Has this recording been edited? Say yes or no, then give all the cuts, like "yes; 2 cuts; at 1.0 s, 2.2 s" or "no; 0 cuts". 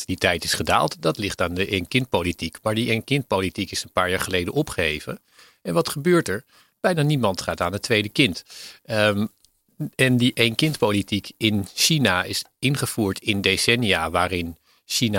no; 0 cuts